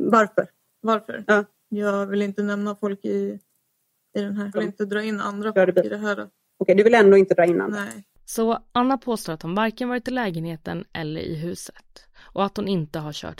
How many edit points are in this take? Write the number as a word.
two